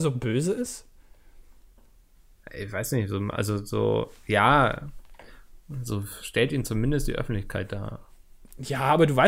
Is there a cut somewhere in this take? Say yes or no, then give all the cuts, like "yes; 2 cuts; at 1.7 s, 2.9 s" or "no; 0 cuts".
no; 0 cuts